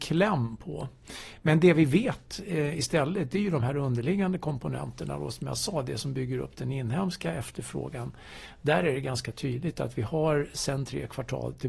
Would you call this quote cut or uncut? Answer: uncut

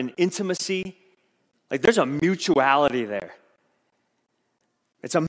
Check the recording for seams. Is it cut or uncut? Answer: uncut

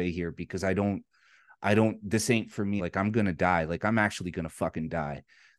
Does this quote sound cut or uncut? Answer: cut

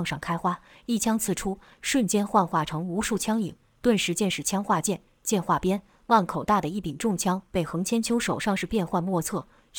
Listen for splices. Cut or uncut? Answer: uncut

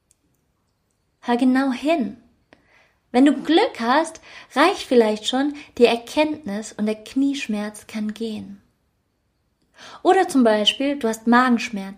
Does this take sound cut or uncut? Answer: uncut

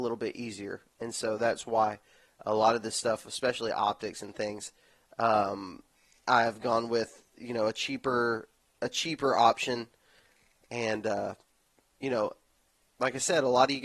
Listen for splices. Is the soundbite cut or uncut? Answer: uncut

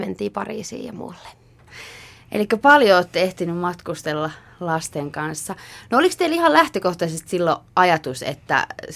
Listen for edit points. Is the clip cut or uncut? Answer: uncut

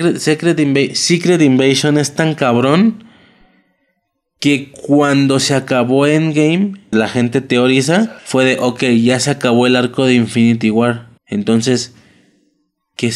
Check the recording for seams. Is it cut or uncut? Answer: cut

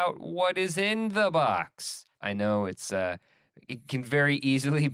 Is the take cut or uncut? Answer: cut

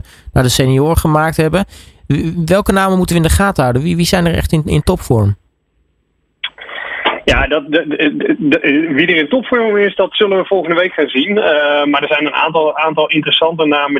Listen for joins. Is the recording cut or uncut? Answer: uncut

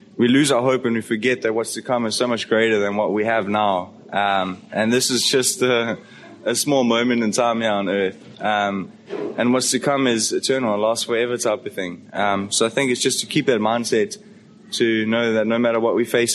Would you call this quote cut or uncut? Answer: uncut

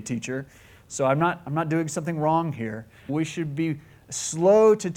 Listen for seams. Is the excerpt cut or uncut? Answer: cut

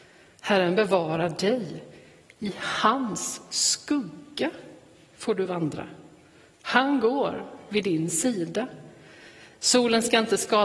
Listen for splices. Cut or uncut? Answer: uncut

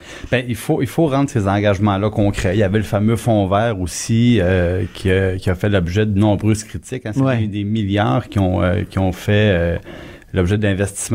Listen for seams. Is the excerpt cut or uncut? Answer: uncut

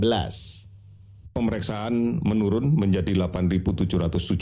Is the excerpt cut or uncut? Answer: uncut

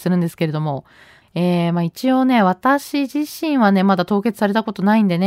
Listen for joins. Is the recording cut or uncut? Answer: cut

